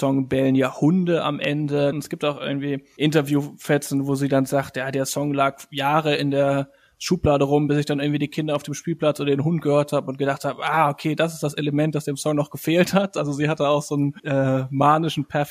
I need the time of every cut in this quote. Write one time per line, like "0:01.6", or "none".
0:01.9